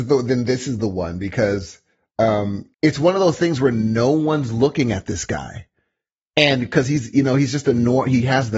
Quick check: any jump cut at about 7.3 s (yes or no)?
no